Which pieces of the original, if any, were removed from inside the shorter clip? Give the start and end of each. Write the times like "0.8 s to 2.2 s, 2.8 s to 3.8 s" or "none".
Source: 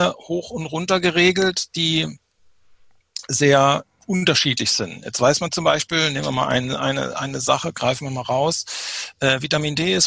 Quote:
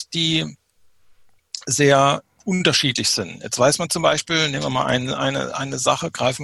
none